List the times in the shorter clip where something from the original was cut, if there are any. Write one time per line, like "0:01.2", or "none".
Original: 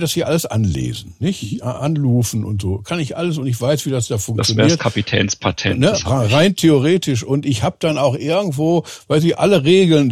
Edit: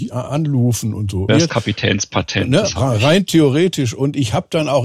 0:01.3